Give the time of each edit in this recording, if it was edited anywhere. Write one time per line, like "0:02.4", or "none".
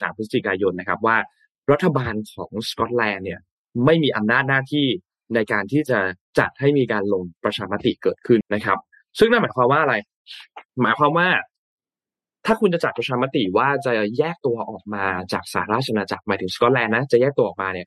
0:08.4
0:10.7